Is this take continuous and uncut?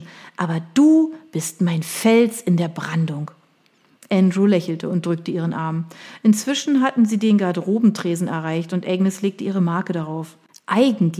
yes; 0 cuts

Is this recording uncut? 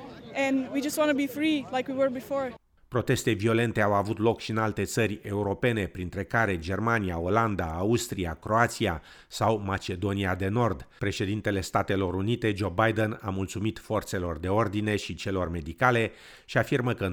no; 1 cut; at 11.0 s

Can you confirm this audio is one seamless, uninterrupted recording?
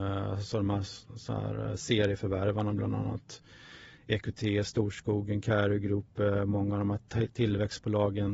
yes; 0 cuts

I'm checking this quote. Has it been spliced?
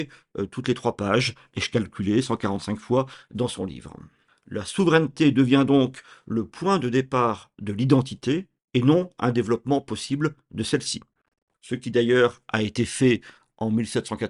yes; 1 cut; at 4.3 s

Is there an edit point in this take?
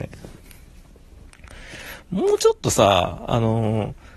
no; 0 cuts

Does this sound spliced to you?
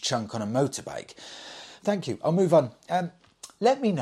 yes; 1 cut; at 1.8 s

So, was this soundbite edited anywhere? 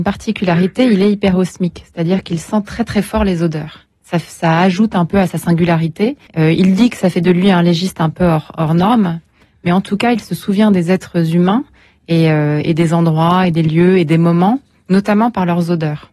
yes; 1 cut; at 6.3 s

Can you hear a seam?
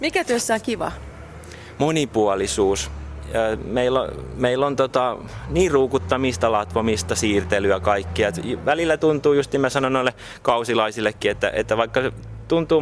no; 0 cuts

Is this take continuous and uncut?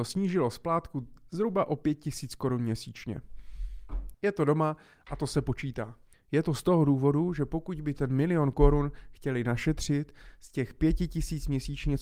no; 2 cuts; at 4.1 s, 6.1 s

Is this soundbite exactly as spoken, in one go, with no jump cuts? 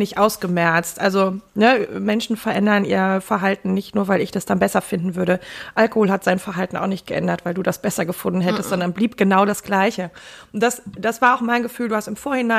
yes; 0 cuts

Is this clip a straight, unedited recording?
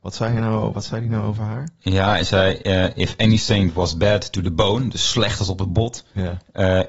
yes; 0 cuts

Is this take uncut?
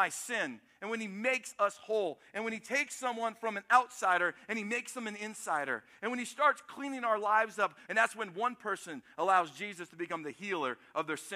no; 1 cut; at 7.9 s

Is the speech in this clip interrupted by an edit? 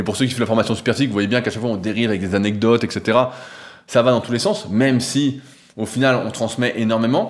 no; 0 cuts

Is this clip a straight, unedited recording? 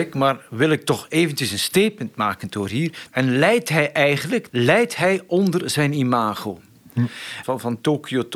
no; 3 cuts; at 3.1 s, 4.5 s, 7.4 s

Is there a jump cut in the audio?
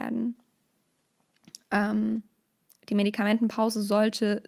no; 0 cuts

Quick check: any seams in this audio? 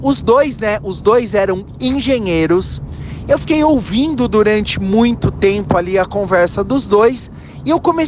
yes; 1 cut; at 3.2 s

